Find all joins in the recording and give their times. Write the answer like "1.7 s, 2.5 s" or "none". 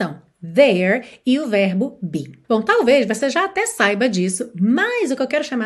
2.4 s